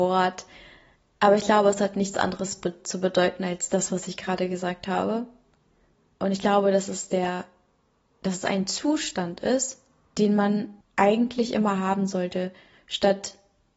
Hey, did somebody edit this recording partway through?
no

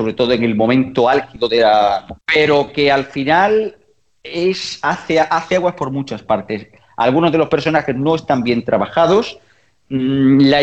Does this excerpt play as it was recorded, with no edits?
no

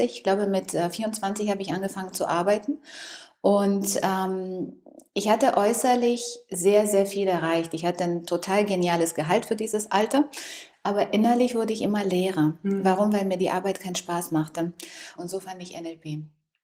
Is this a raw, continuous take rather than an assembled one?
no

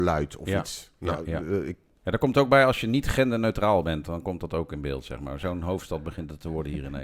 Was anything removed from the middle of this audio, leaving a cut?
no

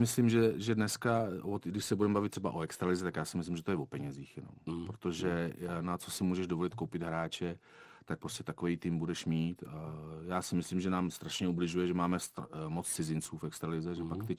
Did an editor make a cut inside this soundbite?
no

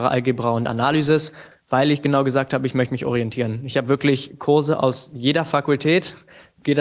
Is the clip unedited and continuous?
no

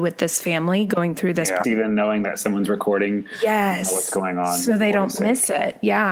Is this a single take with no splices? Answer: no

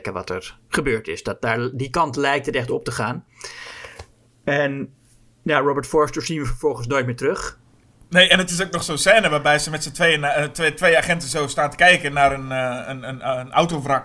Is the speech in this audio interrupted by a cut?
no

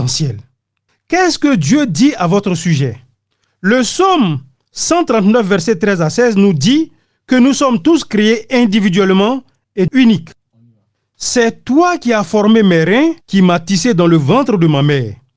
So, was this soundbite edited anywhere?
yes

